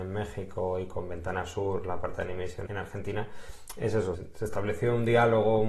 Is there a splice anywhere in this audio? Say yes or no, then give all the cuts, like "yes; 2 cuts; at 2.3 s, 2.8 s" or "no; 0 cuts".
yes; 2 cuts; at 2.7 s, 4.1 s